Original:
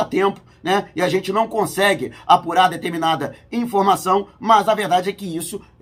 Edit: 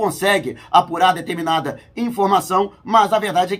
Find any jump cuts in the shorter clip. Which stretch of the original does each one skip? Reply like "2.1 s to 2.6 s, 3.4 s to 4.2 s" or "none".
none